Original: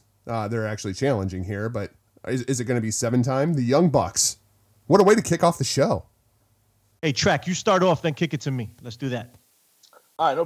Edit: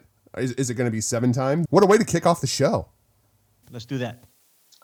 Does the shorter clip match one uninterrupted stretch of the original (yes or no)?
no